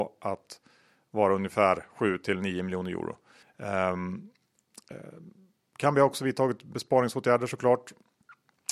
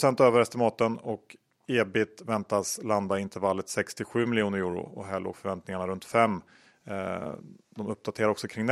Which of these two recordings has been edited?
first; 1 cut; at 3.4 s

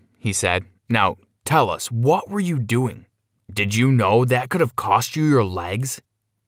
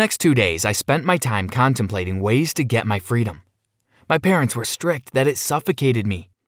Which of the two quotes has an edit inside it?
second; 1 cut; at 4.6 s

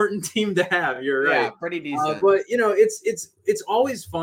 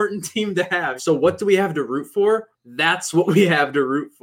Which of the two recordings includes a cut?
second; 2 cuts; at 1.0 s, 2.5 s

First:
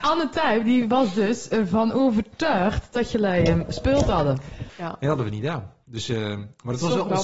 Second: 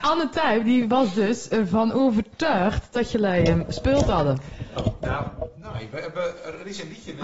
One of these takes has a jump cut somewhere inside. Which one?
first; 1 cut; at 4.7 s

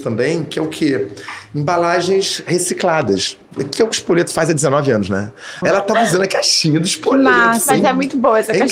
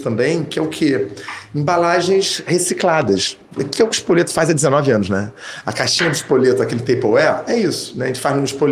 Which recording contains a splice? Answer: first; 1 cut; at 5.6 s

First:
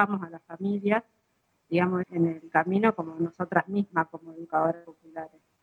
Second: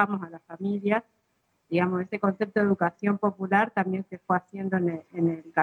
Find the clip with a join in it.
first; 1 cut; at 2.0 s

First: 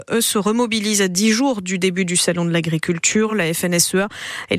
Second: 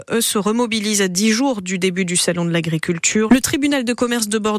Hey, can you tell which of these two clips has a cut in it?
second; 1 cut; at 3.3 s

